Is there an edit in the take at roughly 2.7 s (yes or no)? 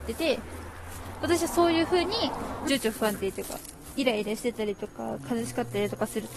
yes